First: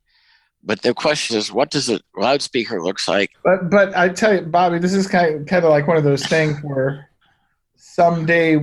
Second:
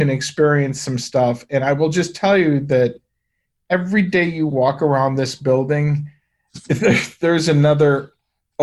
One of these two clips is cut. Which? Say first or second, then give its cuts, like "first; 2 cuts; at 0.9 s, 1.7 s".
first; 2 cuts; at 1.3 s, 3.3 s